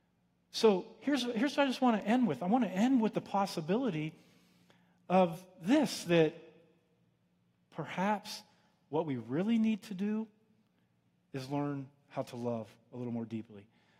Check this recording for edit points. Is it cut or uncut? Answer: uncut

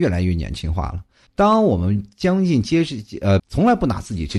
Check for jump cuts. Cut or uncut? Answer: cut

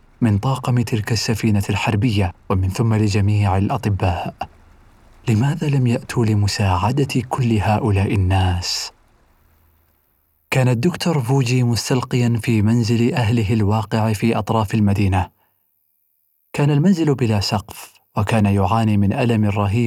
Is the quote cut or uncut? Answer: cut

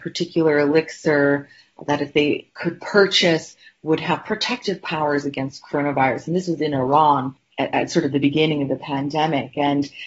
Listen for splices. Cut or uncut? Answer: uncut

